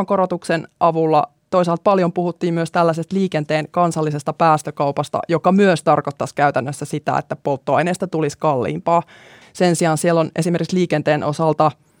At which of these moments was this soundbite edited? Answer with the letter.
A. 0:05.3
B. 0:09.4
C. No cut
B